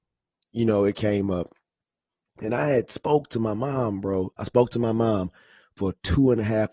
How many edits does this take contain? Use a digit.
0